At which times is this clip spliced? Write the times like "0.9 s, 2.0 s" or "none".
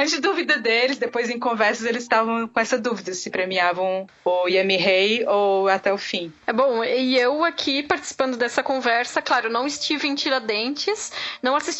none